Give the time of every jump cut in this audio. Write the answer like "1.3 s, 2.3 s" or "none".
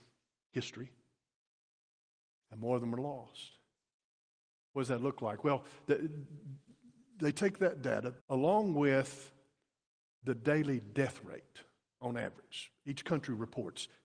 8.2 s